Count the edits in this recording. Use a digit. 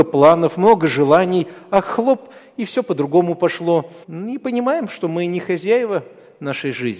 1